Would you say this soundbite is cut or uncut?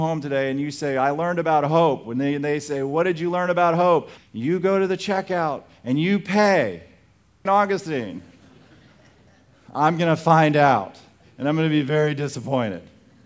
cut